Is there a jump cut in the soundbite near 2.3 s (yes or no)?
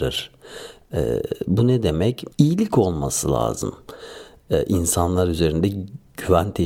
yes